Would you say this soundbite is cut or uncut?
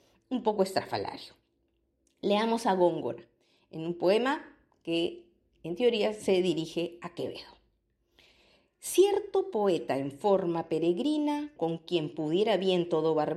cut